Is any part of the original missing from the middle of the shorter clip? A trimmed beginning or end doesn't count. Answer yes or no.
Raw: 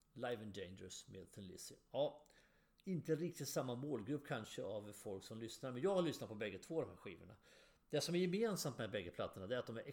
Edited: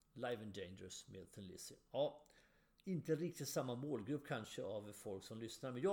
no